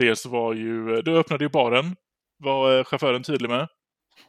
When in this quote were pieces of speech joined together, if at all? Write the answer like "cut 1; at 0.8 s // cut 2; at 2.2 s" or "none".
none